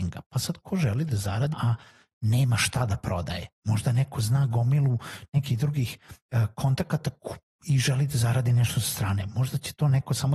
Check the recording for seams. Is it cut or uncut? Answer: cut